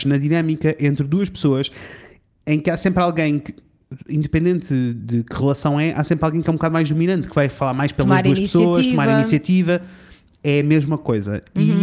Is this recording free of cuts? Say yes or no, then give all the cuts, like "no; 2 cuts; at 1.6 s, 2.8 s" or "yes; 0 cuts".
no; 1 cut; at 7.3 s